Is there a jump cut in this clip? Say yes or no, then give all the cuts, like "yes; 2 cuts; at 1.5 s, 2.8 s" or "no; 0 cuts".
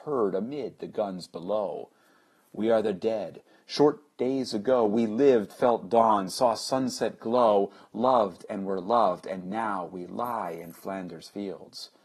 no; 0 cuts